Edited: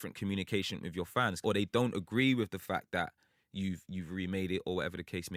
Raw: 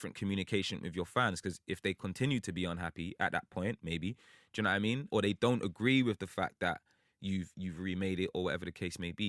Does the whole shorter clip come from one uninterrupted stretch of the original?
no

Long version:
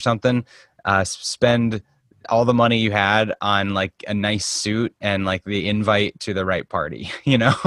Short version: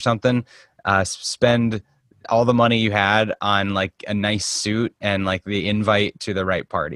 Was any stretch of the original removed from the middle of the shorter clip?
no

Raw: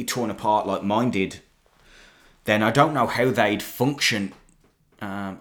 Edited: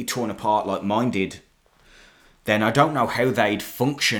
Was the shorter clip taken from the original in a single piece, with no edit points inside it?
yes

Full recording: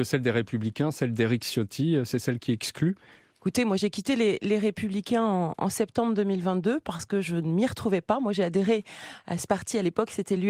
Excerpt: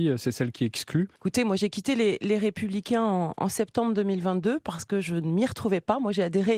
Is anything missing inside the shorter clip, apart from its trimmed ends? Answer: yes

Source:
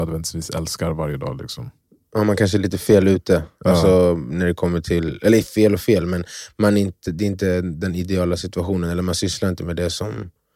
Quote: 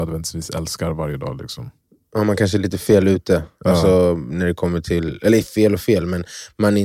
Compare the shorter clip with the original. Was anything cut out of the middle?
no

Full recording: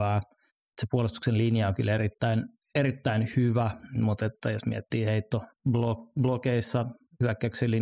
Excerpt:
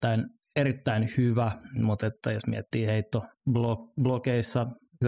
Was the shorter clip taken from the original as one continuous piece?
yes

